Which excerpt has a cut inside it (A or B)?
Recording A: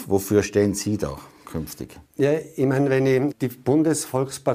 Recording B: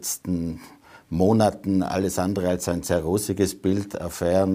A